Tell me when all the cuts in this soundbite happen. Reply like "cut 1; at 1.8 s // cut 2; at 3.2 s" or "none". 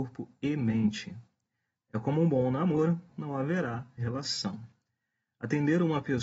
cut 1; at 3.1 s